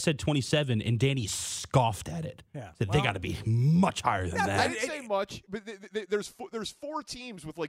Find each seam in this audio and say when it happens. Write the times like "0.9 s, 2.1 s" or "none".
none